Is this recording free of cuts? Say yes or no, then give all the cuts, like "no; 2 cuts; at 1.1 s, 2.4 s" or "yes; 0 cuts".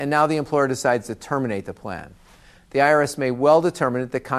yes; 0 cuts